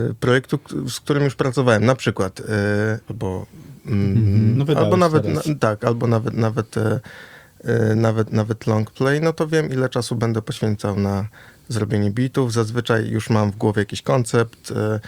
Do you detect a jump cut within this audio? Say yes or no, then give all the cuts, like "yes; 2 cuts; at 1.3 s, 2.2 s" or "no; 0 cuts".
yes; 1 cut; at 3.1 s